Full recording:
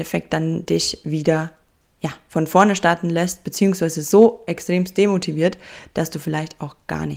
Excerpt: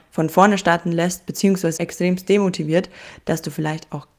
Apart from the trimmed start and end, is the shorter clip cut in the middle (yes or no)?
yes